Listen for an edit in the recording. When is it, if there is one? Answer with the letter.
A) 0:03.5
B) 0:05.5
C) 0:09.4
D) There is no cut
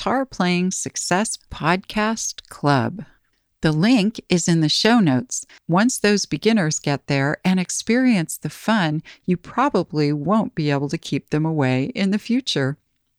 B